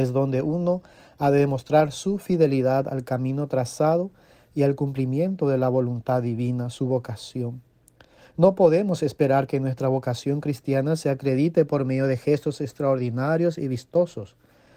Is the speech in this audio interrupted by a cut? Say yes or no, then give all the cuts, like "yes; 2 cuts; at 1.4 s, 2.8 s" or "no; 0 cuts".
no; 0 cuts